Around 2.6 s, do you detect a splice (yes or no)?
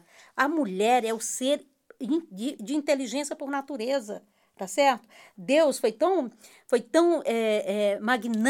yes